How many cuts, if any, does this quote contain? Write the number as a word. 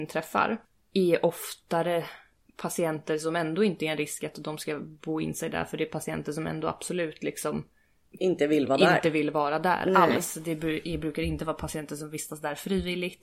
zero